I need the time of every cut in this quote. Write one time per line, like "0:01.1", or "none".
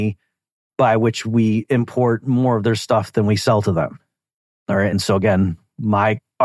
none

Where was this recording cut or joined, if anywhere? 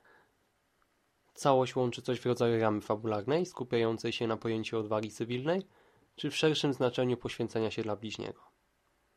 none

